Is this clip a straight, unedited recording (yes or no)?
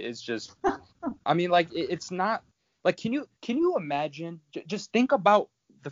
no